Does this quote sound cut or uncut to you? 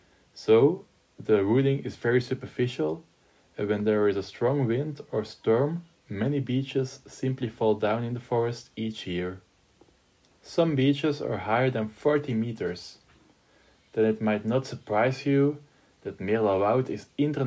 cut